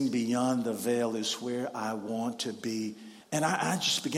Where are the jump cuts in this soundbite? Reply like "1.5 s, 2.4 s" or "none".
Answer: 3.2 s